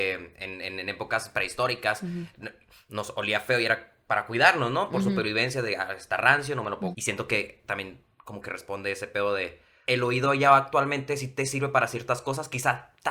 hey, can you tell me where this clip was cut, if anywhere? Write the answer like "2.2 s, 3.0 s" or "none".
6.9 s, 9.8 s